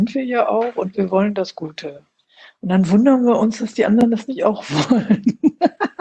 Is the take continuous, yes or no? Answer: yes